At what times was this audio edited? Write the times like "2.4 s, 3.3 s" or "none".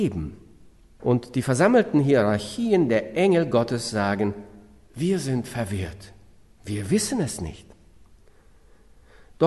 1.0 s